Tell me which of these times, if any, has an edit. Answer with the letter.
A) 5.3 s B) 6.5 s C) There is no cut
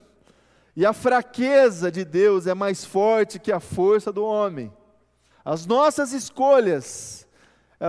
A